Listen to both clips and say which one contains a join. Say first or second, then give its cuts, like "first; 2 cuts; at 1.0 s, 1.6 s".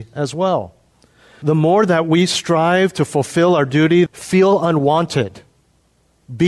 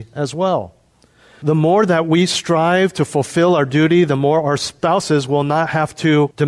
first; 1 cut; at 4.1 s